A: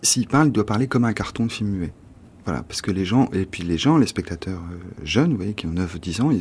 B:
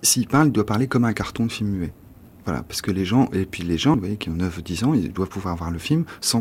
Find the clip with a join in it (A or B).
B